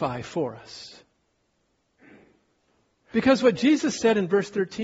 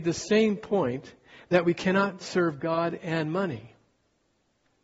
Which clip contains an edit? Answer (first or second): first